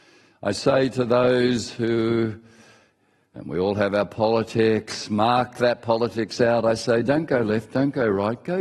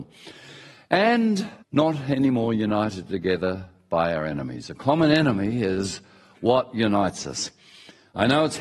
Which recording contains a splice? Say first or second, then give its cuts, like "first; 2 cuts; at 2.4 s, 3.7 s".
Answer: second; 1 cut; at 1.6 s